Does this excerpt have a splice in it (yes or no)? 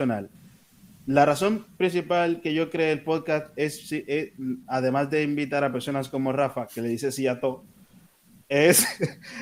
no